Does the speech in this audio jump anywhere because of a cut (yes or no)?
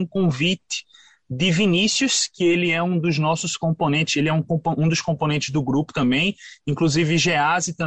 no